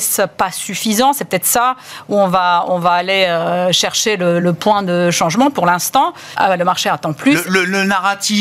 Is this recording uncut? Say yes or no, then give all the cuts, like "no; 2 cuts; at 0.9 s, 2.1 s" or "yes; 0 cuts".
no; 2 cuts; at 4.4 s, 6.3 s